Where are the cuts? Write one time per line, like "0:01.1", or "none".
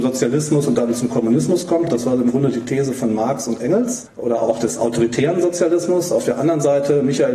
none